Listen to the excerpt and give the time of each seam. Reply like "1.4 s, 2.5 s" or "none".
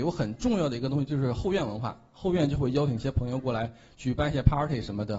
none